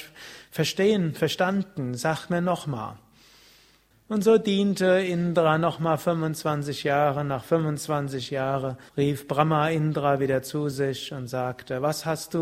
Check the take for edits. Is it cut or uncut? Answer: cut